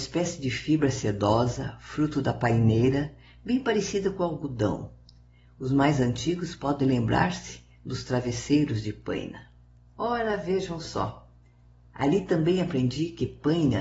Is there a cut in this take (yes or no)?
yes